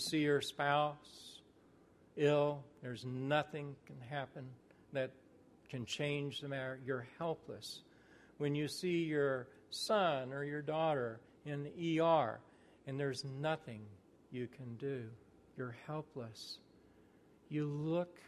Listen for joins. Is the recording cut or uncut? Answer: uncut